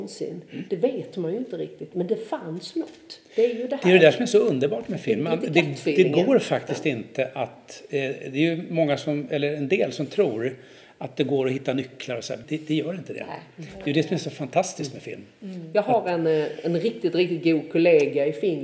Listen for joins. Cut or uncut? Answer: cut